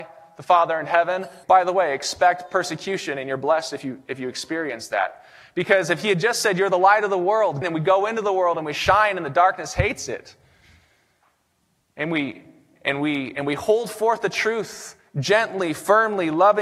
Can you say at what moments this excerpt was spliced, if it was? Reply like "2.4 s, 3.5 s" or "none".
1.4 s, 7.6 s